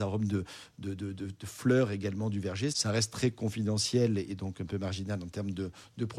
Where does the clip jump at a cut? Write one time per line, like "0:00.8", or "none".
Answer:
0:02.7

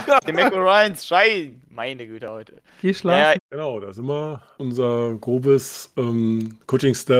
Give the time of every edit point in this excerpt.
0:03.4
0:04.5

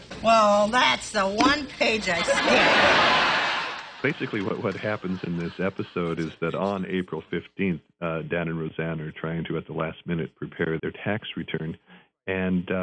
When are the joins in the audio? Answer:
0:10.8

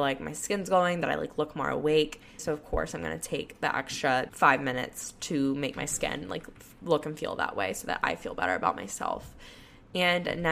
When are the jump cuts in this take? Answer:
0:02.4
0:04.3

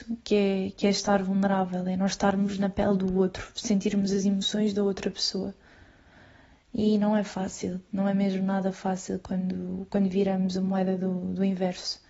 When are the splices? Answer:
none

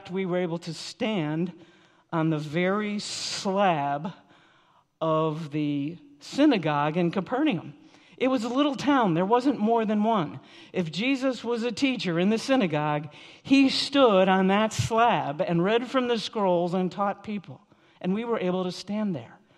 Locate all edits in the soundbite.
none

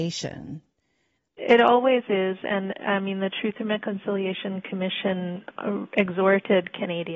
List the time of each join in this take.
0:01.2

